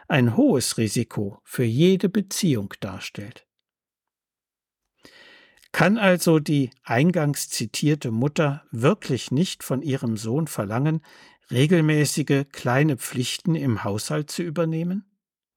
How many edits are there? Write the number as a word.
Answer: zero